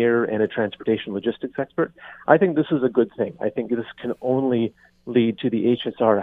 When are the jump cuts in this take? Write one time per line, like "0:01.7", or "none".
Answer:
none

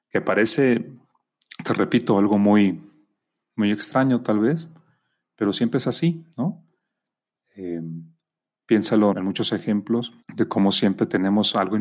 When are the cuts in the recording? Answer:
0:09.1
0:10.2

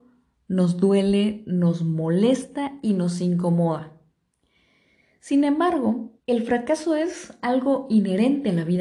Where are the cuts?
0:06.2

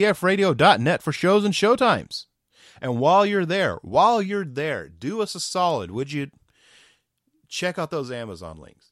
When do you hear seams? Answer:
none

